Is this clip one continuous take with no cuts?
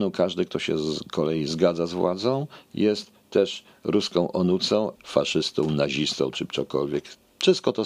no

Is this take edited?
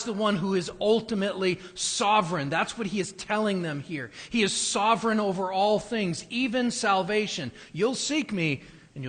no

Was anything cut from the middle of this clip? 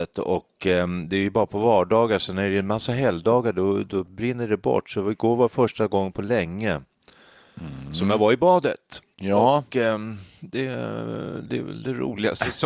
yes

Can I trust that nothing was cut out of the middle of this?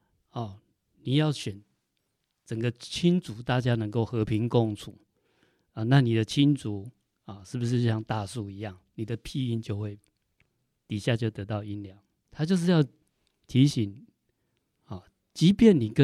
no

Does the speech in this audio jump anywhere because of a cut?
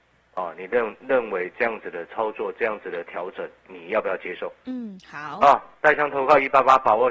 no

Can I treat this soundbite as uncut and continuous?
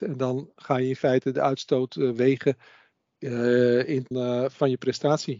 no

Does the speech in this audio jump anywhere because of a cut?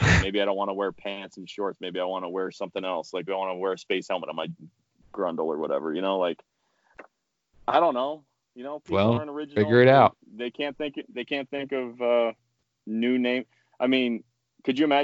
yes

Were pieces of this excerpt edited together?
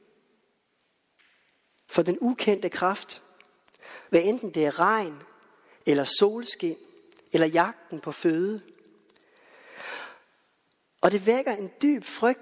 yes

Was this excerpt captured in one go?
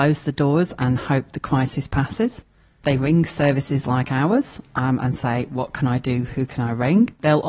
yes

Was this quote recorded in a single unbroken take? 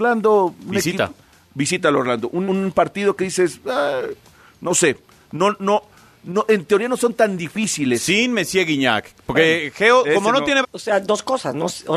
no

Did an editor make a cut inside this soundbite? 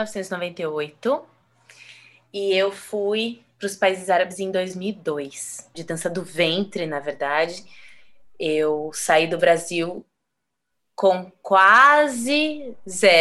yes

